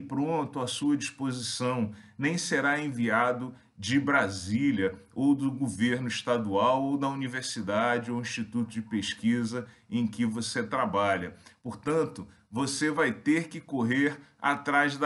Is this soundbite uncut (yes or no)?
yes